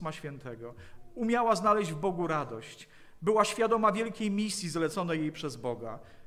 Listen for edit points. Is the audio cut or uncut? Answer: uncut